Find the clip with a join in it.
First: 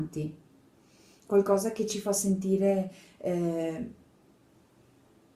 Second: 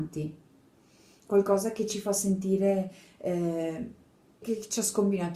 second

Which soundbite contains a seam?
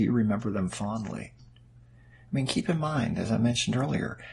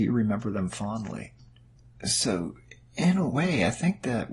first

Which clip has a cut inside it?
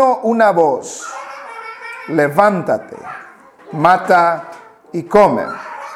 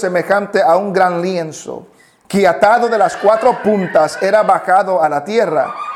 first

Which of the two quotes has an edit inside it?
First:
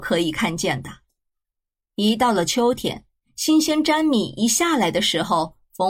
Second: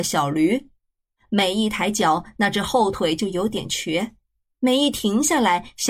second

